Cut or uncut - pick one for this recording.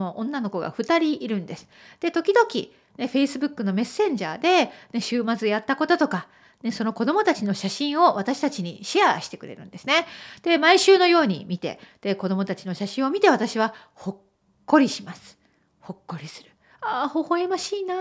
uncut